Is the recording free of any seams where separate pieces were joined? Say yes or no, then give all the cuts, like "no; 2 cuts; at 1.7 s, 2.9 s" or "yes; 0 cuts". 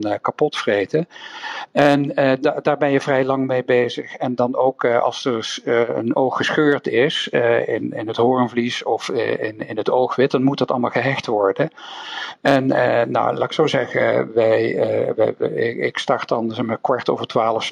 yes; 0 cuts